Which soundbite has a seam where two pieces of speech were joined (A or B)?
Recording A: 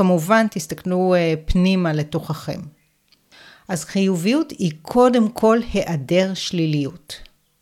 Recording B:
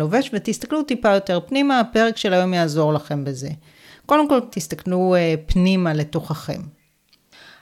B